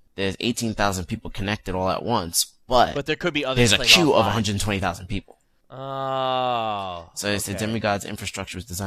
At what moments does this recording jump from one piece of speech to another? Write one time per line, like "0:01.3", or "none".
none